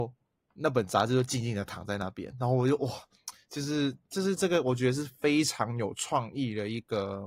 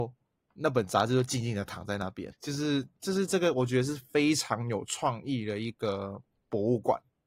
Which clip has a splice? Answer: second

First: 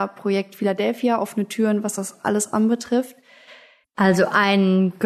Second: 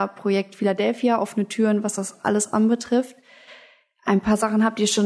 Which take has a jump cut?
first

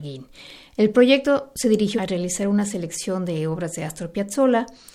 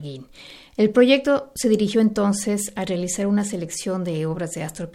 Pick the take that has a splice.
first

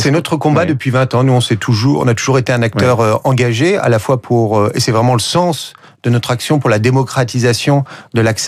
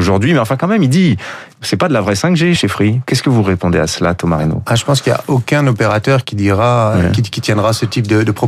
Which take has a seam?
second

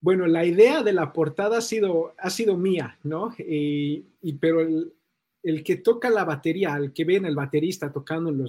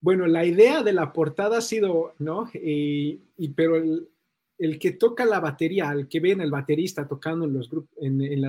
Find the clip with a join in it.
second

